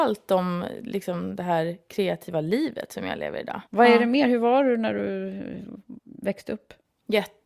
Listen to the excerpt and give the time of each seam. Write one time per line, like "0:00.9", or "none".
0:03.7
0:06.0